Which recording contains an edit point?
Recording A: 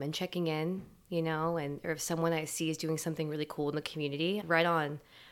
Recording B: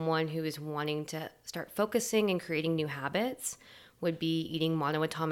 A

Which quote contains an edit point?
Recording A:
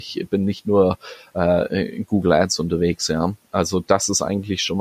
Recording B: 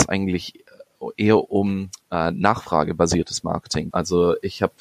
B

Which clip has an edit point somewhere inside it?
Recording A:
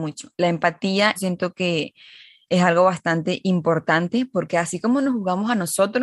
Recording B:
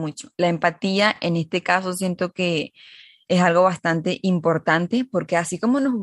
A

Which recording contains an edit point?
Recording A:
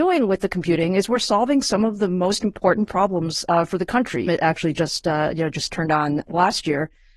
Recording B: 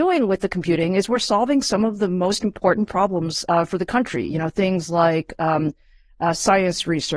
A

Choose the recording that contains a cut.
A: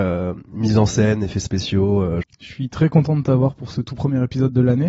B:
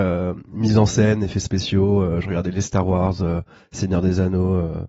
A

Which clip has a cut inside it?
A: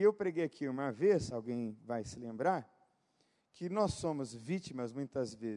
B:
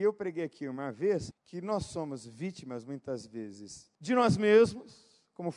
B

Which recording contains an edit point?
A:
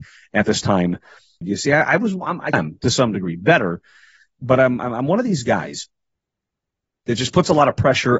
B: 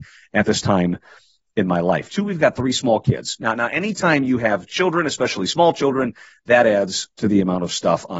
A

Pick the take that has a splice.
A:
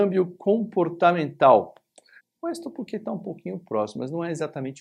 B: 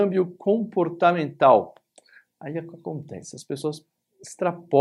A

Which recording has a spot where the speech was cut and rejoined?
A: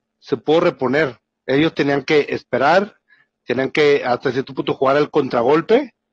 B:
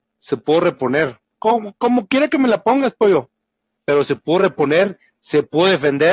A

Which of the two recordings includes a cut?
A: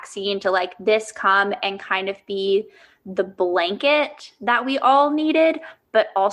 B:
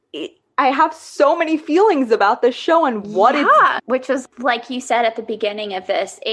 B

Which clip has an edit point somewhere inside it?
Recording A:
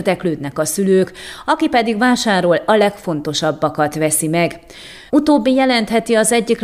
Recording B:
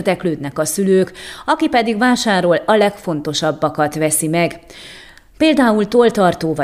A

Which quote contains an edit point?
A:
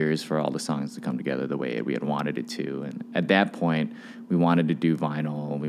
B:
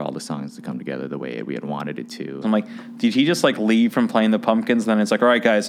B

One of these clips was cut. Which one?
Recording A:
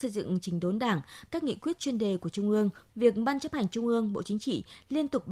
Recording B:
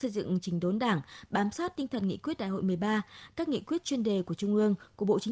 A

